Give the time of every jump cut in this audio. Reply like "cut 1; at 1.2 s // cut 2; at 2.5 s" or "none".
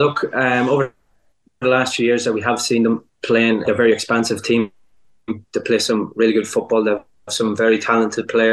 cut 1; at 3.7 s